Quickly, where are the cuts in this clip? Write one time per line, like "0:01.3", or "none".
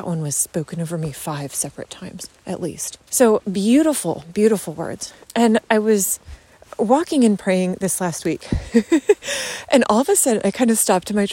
0:03.0
0:05.2